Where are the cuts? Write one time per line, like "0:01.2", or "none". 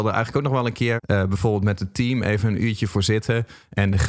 0:01.0